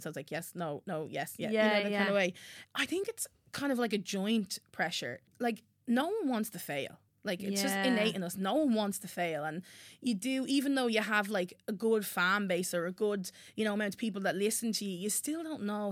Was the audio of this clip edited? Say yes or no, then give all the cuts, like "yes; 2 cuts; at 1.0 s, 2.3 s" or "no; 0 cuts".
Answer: yes; 2 cuts; at 2.6 s, 5.3 s